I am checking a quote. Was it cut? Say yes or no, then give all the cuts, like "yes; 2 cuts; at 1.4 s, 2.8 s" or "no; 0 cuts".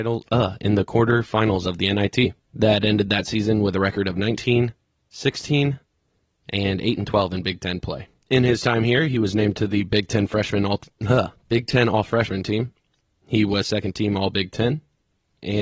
no; 0 cuts